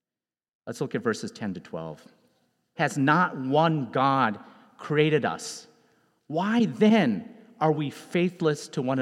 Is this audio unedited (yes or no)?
no